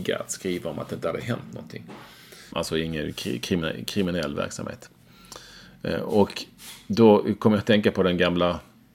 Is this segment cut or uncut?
cut